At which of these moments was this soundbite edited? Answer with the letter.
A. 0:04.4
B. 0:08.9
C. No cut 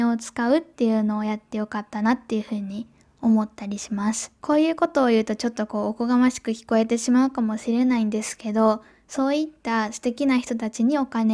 A